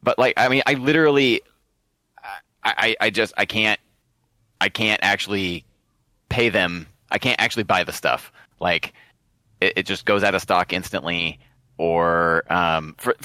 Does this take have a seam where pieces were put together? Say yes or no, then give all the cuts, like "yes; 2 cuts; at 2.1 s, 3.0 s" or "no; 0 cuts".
no; 0 cuts